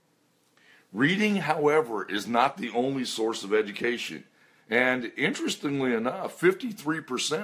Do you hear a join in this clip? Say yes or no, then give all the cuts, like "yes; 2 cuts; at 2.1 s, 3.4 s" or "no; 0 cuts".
yes; 1 cut; at 4.6 s